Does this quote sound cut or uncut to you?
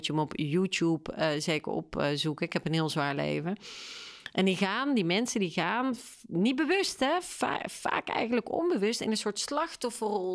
uncut